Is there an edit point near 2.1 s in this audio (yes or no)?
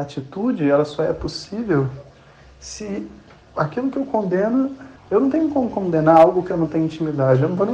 no